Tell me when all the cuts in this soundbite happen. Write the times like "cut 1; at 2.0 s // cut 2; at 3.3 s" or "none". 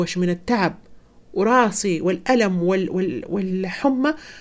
none